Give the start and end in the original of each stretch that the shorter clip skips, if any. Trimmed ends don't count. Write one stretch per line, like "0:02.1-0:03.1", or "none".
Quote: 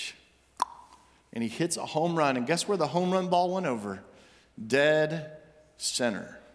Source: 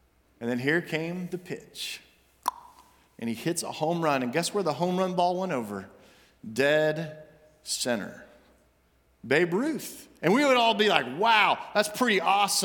none